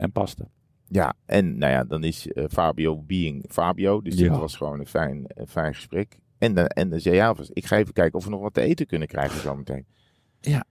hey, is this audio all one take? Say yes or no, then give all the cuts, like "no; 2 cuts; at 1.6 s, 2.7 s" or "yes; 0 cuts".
yes; 0 cuts